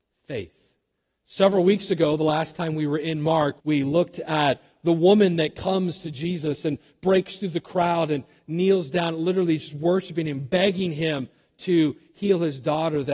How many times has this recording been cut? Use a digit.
1